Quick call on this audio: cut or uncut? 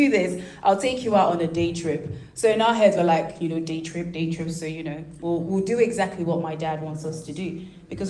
uncut